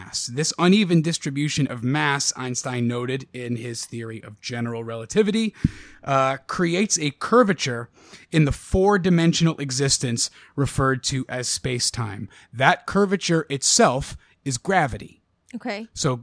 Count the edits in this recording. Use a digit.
0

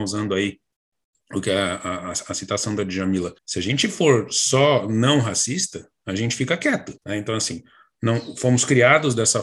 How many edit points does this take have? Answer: 2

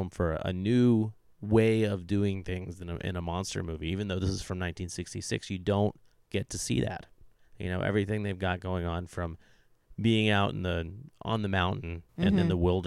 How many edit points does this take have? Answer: 1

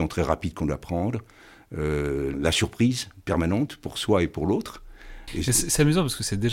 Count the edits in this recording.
2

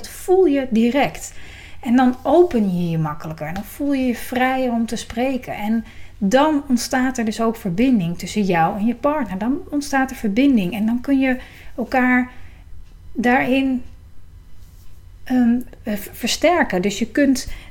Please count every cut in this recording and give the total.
0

